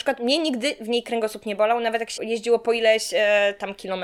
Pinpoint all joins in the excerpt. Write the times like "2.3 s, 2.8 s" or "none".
2.2 s